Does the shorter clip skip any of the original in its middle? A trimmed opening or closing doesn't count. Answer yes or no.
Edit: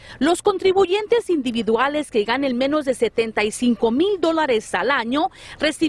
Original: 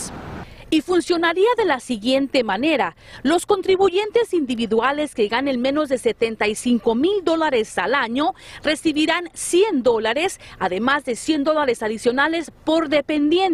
no